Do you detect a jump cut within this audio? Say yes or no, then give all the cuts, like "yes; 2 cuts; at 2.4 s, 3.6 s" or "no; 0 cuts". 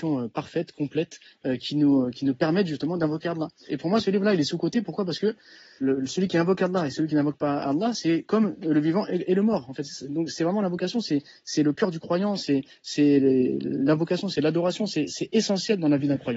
yes; 2 cuts; at 3.7 s, 5.8 s